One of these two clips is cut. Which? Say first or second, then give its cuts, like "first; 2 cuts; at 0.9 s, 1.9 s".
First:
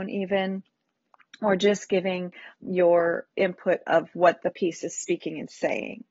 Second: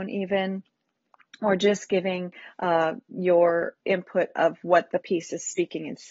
first; 1 cut; at 2.6 s